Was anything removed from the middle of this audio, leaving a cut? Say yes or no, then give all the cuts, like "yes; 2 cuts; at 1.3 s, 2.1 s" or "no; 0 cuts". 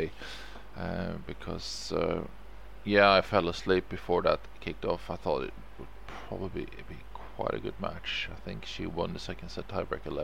no; 0 cuts